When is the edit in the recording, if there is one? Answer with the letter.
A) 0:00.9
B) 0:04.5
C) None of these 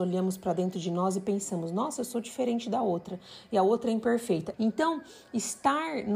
B